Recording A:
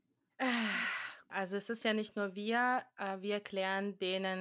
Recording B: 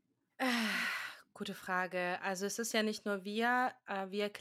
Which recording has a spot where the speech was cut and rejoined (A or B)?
A